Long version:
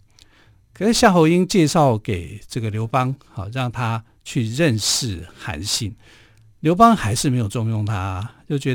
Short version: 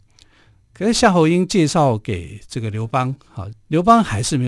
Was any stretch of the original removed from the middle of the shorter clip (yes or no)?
yes